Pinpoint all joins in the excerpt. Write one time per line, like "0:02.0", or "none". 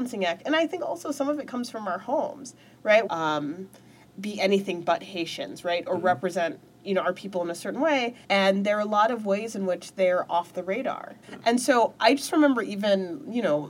0:03.1
0:08.2
0:11.2